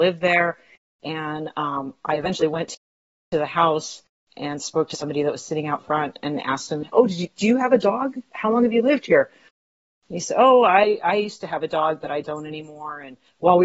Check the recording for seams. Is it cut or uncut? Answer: uncut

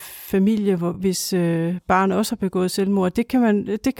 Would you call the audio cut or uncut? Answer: uncut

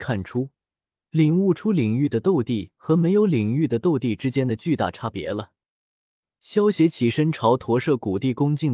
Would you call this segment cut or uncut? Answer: cut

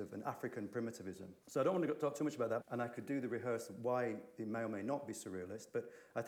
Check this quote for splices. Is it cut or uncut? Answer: cut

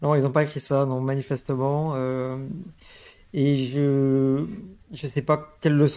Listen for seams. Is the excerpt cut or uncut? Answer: uncut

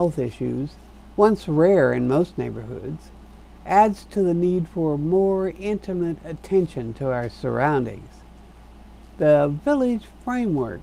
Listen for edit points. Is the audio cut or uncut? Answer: uncut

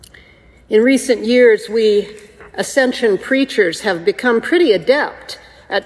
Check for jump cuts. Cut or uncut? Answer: uncut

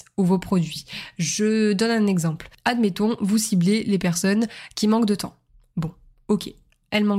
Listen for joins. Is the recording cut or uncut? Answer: uncut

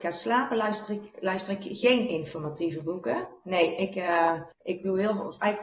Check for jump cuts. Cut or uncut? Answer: cut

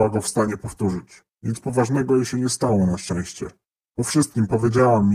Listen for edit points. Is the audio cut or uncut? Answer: cut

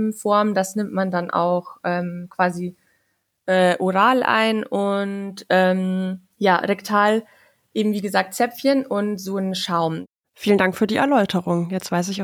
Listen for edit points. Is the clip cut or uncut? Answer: cut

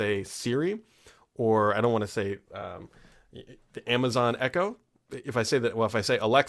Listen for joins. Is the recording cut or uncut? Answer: uncut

